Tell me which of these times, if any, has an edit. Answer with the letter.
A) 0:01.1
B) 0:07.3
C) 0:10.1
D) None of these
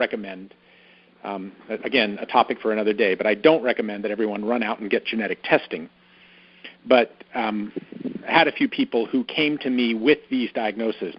D